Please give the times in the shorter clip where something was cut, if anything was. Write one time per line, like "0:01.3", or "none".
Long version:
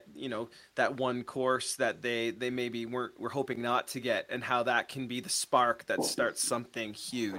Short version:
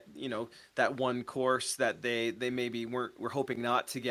none